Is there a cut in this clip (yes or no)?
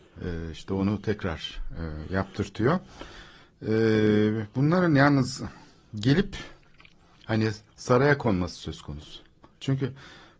no